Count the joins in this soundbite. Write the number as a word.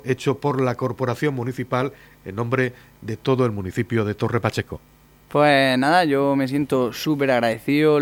zero